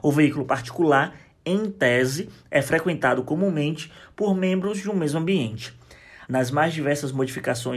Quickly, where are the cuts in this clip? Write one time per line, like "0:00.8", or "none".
0:06.3